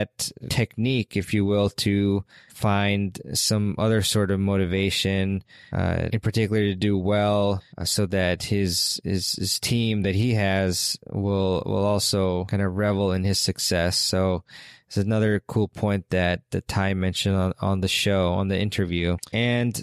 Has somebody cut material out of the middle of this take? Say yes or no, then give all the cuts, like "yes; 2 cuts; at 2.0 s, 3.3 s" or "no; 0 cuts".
no; 0 cuts